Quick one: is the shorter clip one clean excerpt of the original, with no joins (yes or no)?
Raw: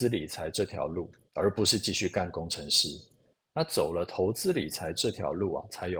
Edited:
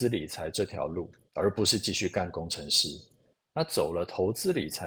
yes